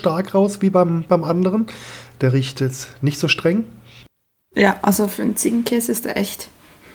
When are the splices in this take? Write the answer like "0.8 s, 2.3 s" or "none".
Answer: none